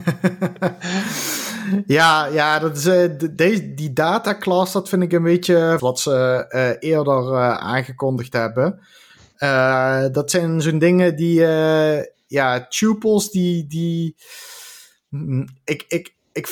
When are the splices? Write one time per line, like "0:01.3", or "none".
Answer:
0:05.8

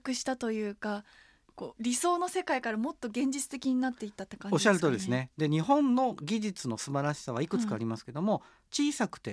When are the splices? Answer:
none

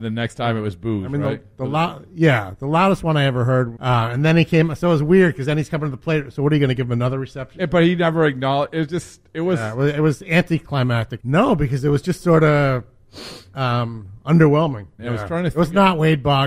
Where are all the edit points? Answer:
0:03.8
0:11.2
0:15.0

